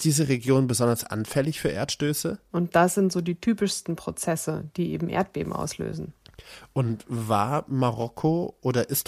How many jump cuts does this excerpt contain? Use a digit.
1